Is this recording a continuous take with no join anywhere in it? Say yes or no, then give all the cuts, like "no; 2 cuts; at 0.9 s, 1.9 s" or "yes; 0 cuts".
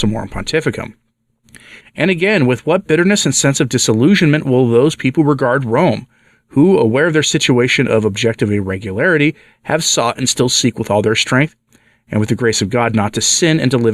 no; 1 cut; at 1.8 s